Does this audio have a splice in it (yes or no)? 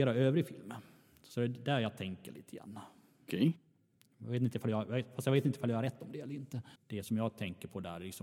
yes